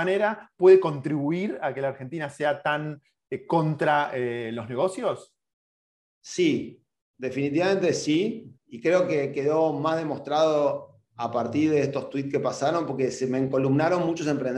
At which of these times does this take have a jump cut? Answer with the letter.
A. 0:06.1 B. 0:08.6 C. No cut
B